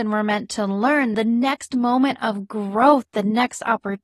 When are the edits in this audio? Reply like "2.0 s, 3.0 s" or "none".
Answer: 1.1 s

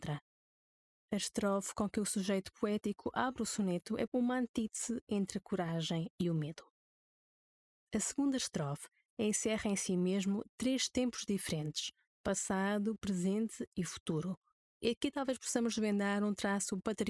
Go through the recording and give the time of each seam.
4.1 s, 14.7 s

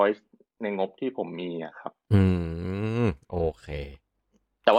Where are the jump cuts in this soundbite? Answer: none

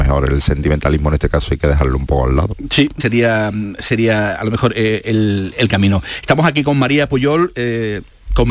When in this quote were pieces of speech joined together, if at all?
3.0 s

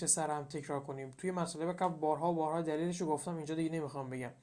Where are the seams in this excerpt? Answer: none

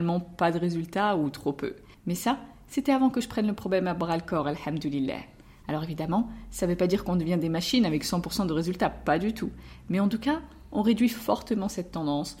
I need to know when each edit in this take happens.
none

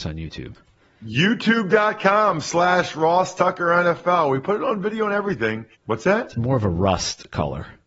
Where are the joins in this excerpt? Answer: 5.8 s

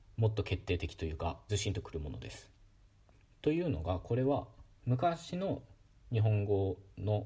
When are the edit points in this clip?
1.5 s

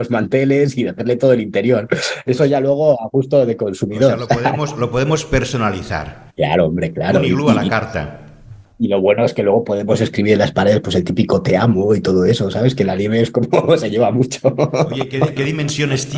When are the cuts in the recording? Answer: 6.3 s

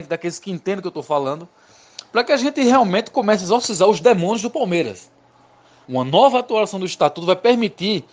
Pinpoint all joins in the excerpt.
5.8 s

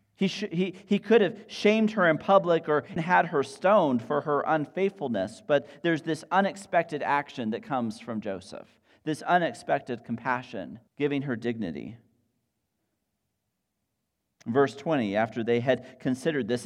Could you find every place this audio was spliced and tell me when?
3.0 s, 10.9 s

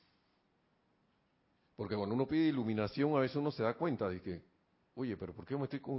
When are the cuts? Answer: none

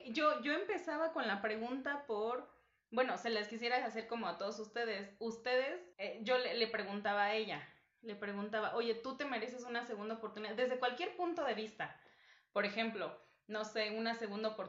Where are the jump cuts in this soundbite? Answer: 5.9 s

